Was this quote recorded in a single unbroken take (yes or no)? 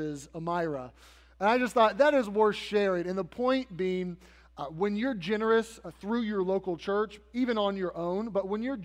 yes